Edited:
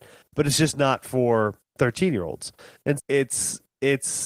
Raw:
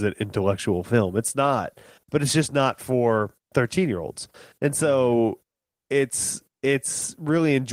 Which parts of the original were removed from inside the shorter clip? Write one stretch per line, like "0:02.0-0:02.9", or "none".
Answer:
0:04.7-0:05.8